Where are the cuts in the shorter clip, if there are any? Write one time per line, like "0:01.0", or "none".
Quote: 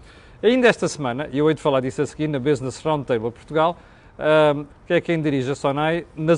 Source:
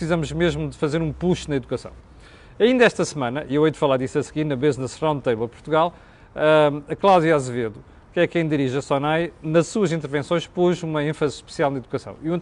0:04.7